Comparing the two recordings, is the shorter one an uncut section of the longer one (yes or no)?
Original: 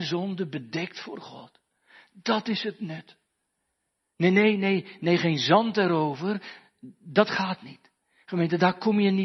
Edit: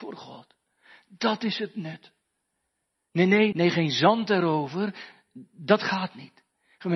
no